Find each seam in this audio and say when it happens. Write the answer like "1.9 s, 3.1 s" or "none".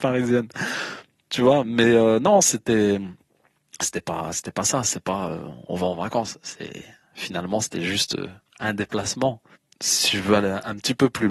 none